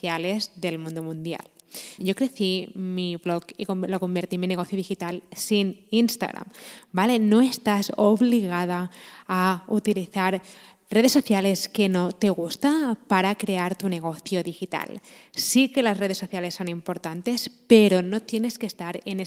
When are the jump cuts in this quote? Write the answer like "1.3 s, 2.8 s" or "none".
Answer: 2.0 s